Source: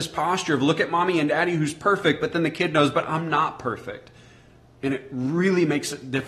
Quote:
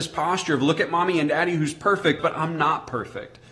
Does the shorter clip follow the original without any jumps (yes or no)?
no